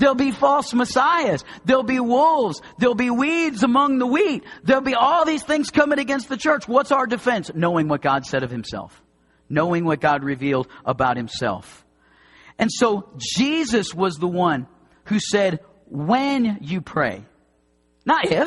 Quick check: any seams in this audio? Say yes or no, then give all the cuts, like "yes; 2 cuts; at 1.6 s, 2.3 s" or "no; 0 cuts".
no; 0 cuts